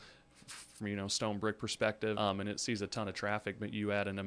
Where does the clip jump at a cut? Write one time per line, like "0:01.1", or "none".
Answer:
0:02.2